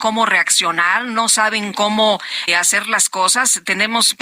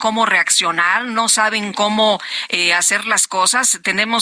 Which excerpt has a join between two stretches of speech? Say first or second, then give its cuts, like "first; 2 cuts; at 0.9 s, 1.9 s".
first; 1 cut; at 2.5 s